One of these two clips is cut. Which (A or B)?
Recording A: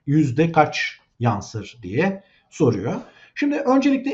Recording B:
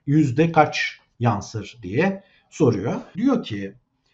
B